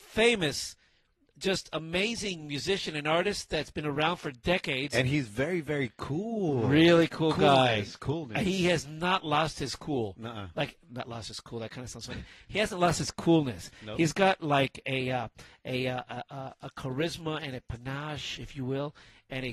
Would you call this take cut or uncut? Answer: uncut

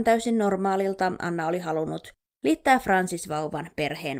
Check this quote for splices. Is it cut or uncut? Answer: uncut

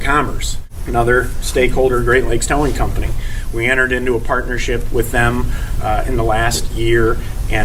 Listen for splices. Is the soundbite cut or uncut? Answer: uncut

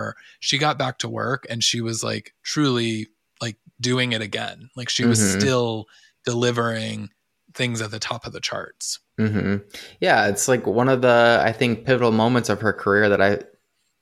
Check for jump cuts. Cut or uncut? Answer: uncut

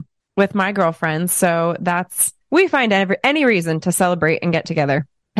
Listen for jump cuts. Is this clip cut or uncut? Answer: uncut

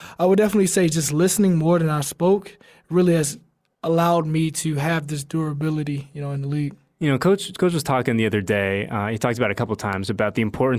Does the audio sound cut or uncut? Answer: uncut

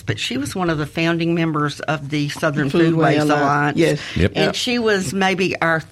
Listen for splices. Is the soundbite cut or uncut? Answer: uncut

